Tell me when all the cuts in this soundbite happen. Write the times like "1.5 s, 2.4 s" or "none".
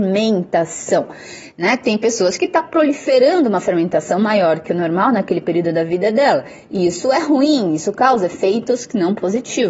none

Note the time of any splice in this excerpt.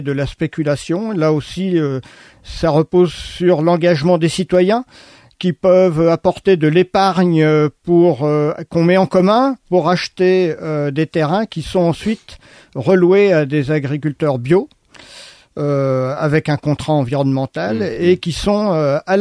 none

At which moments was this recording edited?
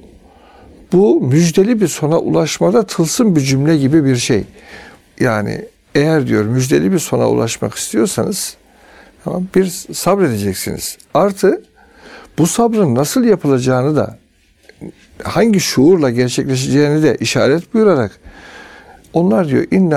5.0 s

